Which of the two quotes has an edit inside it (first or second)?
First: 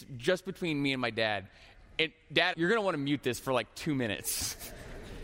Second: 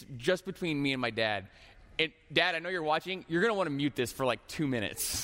first